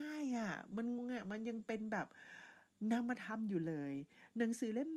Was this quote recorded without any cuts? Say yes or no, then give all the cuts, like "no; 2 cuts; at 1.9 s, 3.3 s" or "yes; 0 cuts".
no; 1 cut; at 1.0 s